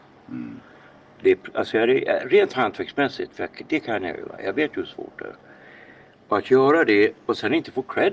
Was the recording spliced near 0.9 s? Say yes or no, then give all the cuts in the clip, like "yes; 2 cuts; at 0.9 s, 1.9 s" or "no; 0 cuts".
no; 0 cuts